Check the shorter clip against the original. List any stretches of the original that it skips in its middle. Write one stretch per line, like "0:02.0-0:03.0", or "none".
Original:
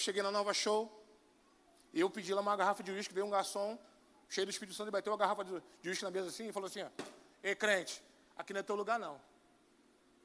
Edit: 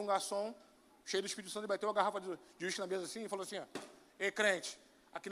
none

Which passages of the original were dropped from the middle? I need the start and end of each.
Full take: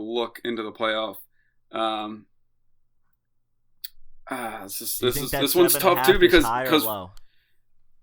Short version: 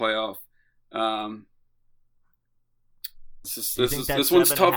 0:04.2-0:04.7

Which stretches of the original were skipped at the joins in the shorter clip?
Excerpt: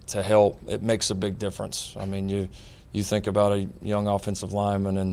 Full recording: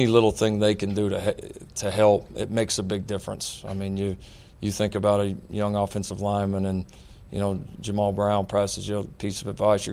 none

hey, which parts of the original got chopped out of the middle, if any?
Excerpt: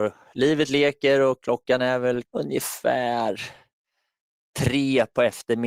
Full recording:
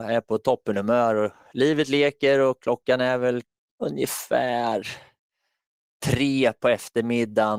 0:03.5-0:03.7

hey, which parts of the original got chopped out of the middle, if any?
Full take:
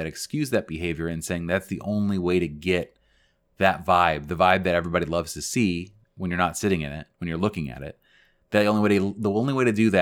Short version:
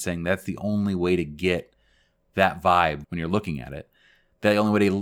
0:04.3-0:07.1

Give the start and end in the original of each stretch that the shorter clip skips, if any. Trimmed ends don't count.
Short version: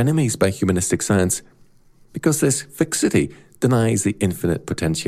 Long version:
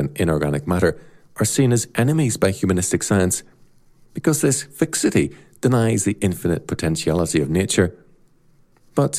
none

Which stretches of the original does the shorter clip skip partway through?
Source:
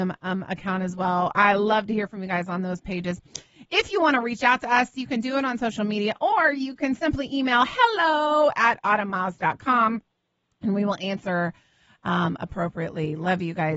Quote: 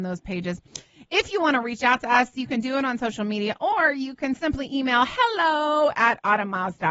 none

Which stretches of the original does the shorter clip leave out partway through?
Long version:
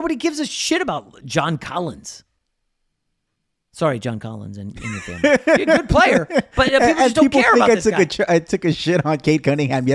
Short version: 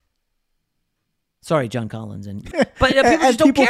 0:04.8-0:06.3

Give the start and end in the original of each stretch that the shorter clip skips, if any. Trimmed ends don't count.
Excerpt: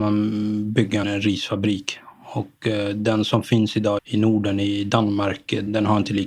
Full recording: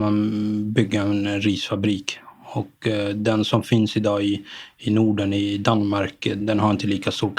0:01.0-0:01.2
0:04.2-0:04.7

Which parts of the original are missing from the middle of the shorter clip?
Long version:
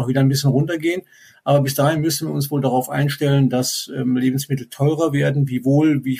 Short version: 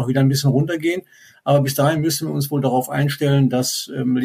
none

